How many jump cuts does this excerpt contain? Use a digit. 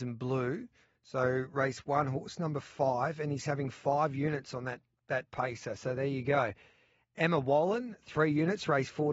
0